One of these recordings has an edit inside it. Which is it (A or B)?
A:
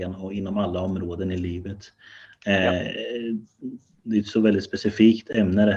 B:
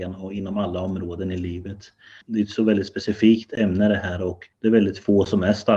B